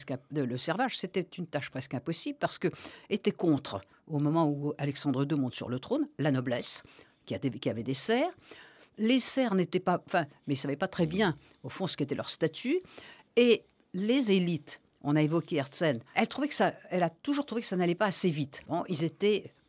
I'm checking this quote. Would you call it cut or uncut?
cut